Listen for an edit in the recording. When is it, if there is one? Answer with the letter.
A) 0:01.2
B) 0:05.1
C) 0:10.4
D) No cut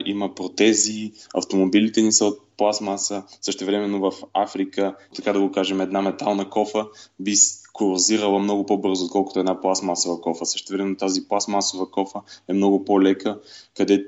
B